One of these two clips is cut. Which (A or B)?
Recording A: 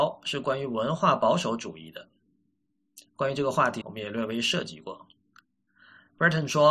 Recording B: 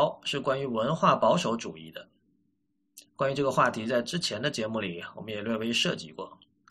A